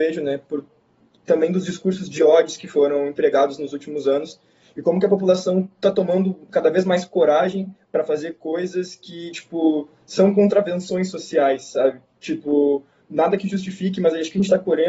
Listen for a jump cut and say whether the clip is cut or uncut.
uncut